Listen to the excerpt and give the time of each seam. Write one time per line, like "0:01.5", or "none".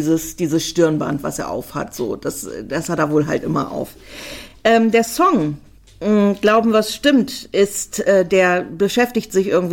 none